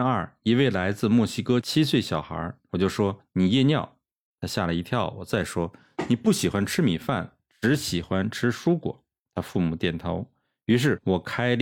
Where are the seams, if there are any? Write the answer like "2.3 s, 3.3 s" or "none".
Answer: 2.7 s